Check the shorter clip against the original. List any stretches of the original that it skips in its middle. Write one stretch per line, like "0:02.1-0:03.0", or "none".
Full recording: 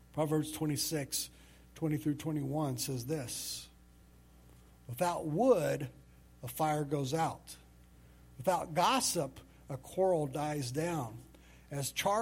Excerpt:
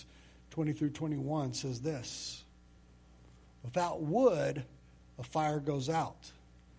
none